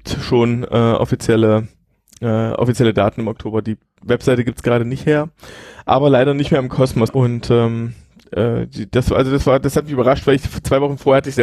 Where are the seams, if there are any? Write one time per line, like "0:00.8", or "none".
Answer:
0:07.1